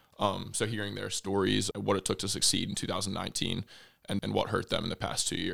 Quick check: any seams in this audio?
yes; 2 cuts; at 1.7 s, 4.2 s

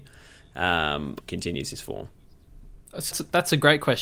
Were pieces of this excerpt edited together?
yes; 2 cuts; at 1.2 s, 3.1 s

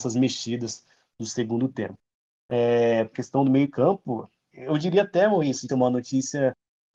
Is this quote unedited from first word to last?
no; 3 cuts; at 3.1 s, 4.5 s, 5.7 s

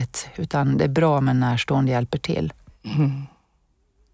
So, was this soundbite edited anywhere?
no; 0 cuts

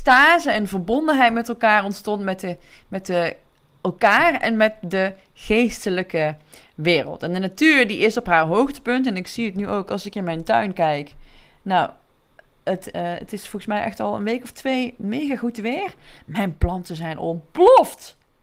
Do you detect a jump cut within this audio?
yes; 1 cut; at 12.9 s

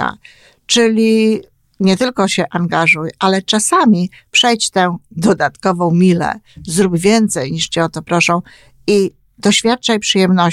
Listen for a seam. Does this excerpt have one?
no; 0 cuts

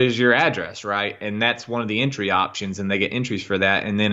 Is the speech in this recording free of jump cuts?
yes; 0 cuts

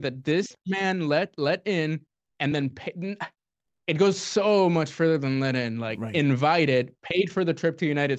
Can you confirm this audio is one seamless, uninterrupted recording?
yes; 0 cuts

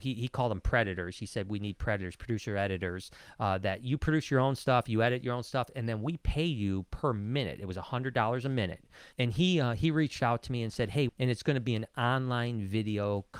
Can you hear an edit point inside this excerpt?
yes; 2 cuts; at 9.1 s, 11.1 s

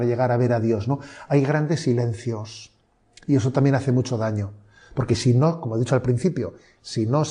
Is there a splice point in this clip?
no; 0 cuts

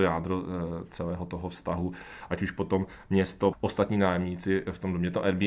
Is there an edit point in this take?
yes; 1 cut; at 3.5 s

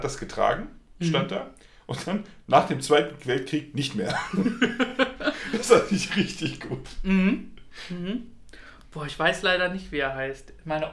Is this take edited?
no; 0 cuts

